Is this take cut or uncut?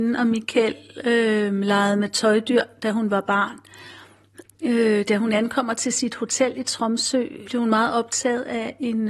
cut